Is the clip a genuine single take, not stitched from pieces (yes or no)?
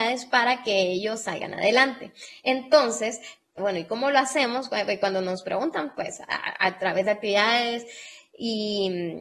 no